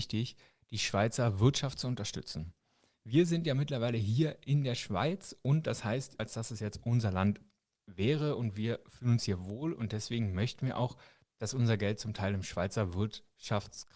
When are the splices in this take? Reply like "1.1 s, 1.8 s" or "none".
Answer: 6.2 s